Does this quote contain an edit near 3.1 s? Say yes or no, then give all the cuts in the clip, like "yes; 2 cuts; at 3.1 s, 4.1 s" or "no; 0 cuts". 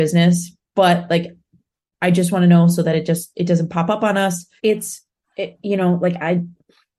no; 1 cut; at 4.6 s